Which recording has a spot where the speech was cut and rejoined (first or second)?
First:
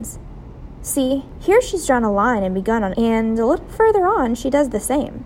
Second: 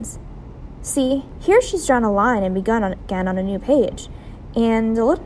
first